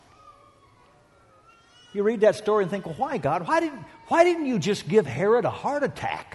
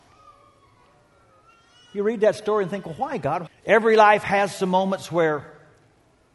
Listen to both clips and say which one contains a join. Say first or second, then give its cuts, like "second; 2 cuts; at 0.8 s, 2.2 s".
second; 1 cut; at 3.5 s